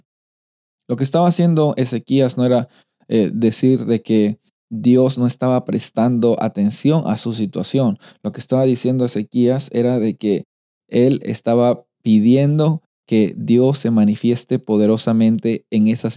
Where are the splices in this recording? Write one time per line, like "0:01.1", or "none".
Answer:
none